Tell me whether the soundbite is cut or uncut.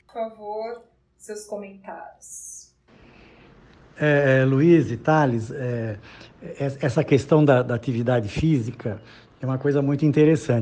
uncut